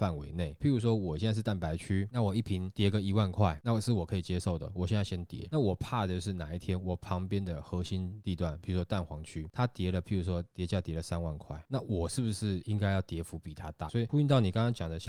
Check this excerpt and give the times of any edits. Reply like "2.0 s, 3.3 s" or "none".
13.9 s